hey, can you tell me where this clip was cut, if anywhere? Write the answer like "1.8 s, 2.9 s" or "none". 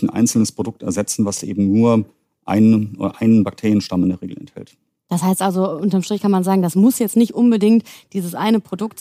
none